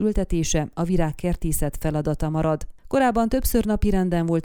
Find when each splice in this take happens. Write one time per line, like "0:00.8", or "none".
none